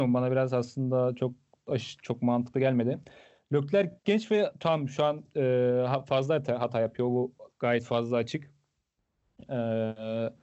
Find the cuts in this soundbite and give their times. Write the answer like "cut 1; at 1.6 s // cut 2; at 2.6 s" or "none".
none